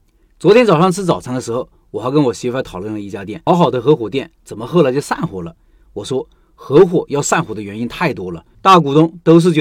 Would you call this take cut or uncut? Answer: cut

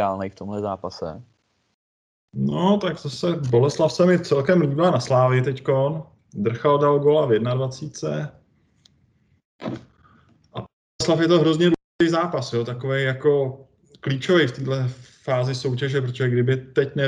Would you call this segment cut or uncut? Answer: uncut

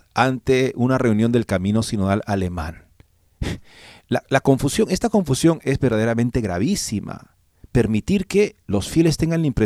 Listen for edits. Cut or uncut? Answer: uncut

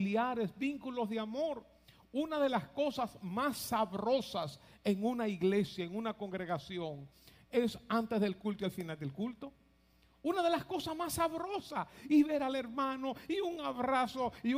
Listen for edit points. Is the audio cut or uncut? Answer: uncut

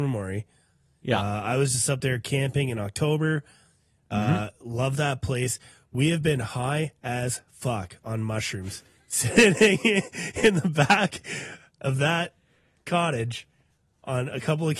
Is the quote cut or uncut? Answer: uncut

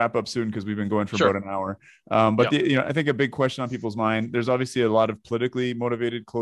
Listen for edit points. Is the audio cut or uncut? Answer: uncut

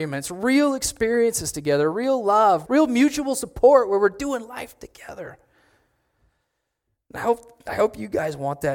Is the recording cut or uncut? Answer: cut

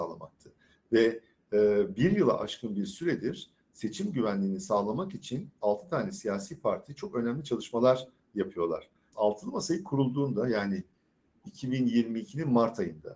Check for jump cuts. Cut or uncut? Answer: cut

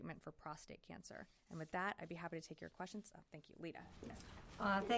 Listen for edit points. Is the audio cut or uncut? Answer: cut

